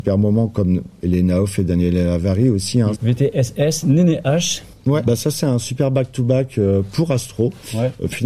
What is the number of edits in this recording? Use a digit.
2